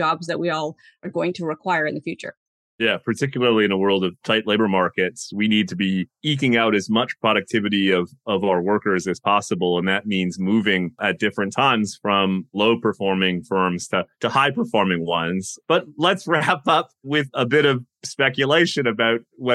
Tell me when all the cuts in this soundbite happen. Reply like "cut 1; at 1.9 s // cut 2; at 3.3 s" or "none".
none